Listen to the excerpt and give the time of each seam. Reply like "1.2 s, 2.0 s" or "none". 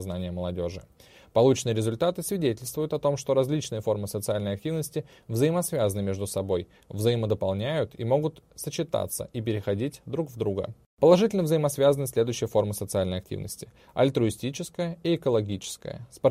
none